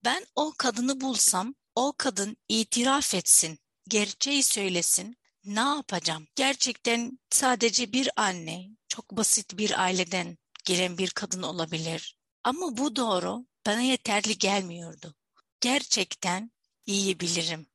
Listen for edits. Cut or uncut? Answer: cut